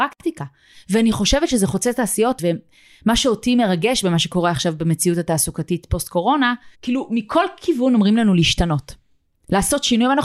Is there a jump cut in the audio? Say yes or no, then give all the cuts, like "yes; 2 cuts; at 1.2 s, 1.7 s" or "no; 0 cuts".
yes; 2 cuts; at 2.4 s, 6.7 s